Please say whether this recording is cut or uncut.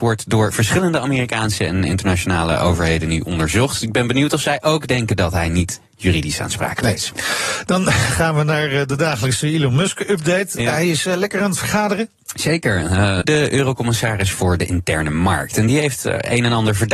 cut